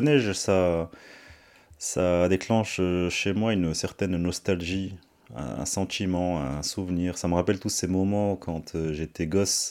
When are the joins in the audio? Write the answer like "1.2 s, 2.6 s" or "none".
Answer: none